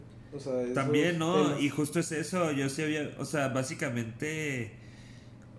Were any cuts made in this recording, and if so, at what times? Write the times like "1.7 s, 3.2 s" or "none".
none